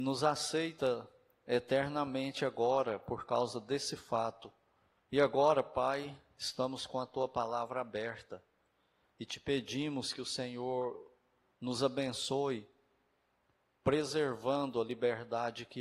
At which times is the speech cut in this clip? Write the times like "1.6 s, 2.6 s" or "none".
5.0 s, 9.1 s